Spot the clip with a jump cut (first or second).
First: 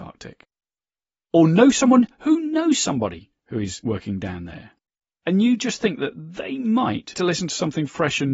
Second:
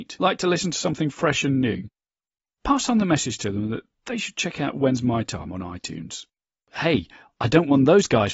first